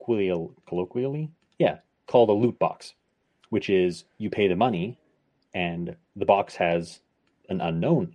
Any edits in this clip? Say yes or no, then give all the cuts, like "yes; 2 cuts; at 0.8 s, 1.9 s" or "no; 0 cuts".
no; 0 cuts